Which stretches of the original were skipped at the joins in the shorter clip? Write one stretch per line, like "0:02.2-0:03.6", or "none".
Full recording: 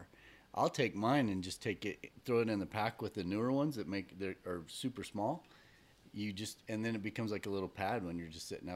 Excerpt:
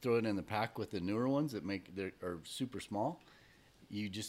none

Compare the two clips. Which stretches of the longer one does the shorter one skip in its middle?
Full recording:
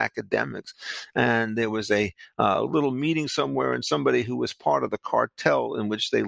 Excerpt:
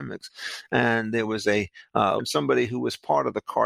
0:02.6-0:03.8

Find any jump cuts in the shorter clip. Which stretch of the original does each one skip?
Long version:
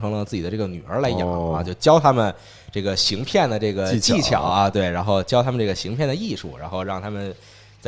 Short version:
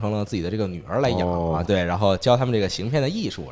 0:01.7-0:04.7

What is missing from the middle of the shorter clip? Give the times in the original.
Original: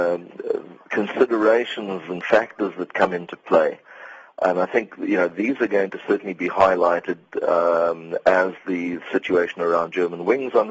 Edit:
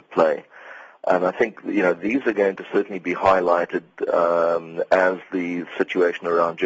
none

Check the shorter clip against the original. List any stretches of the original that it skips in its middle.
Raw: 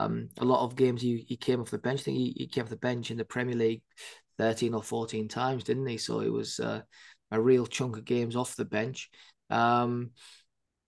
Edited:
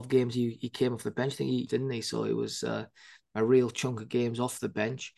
0:02.3-0:05.6

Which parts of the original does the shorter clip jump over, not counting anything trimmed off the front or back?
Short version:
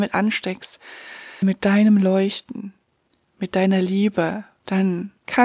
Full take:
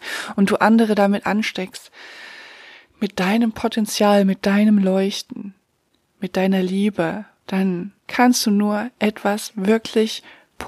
0:02.5-0:04.2

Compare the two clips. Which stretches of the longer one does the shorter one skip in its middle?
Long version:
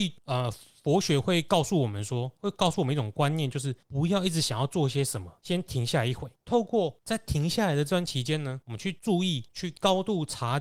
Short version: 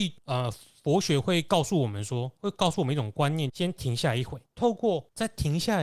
0:03.5-0:05.4

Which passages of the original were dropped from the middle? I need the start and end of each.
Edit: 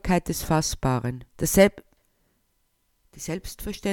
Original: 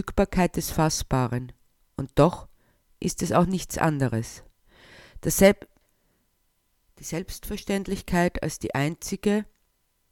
0:01.6-0:05.2

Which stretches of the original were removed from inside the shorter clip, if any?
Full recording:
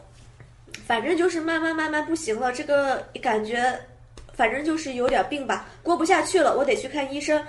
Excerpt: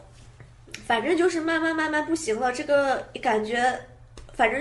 none

